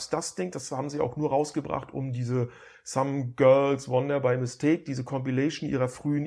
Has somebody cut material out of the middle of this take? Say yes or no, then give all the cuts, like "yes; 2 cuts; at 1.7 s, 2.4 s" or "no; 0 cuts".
no; 0 cuts